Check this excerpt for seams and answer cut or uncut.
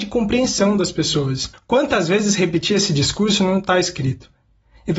cut